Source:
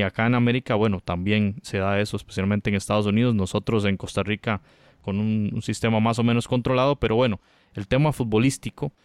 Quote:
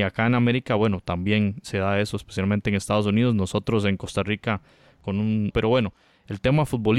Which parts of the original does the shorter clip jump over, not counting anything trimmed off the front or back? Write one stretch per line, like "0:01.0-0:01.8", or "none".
0:05.5-0:07.0

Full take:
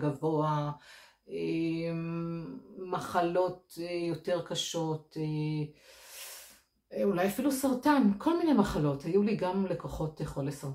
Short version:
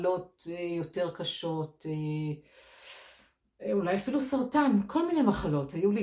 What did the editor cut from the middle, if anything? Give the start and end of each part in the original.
none

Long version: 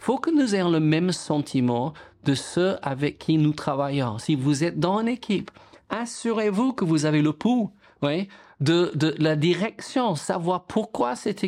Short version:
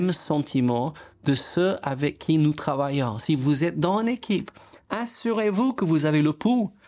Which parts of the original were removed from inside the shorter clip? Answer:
none

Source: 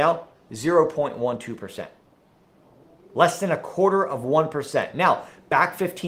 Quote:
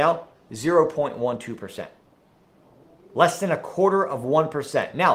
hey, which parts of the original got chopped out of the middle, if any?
none

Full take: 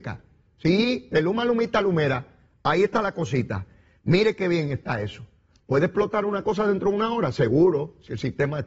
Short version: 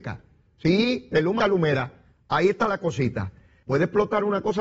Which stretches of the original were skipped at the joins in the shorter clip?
0:01.4-0:01.7
0:04.0-0:05.6

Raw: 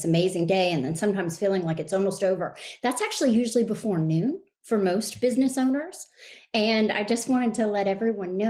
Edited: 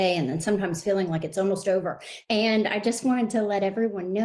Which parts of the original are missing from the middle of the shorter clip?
0:02.8-0:06.5

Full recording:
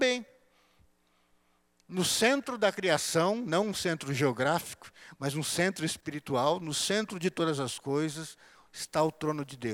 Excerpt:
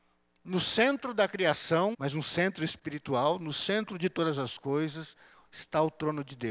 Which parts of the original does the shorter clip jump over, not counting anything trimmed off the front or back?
0:03.4-0:05.1

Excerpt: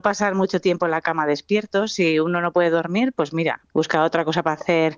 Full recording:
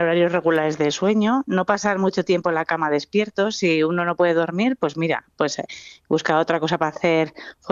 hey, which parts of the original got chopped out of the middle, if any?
0:05.3-0:06.0

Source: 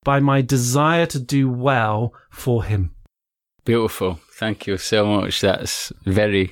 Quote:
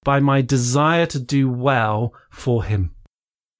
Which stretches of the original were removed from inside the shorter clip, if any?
none

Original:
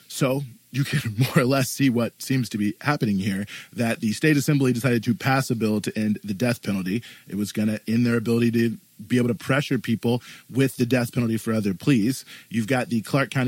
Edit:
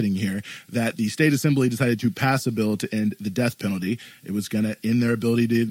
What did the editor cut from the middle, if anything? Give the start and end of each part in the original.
none

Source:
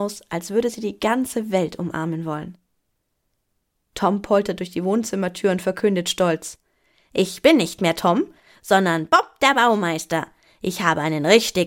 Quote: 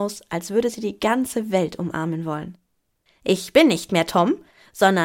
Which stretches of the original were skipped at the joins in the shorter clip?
0:03.1-0:07.0

